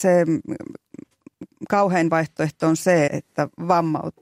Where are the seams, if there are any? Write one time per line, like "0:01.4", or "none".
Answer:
0:03.1